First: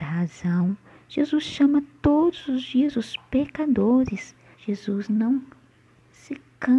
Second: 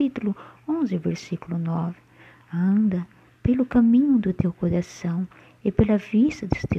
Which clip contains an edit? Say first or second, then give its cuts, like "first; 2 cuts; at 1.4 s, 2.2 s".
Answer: first; 1 cut; at 4.5 s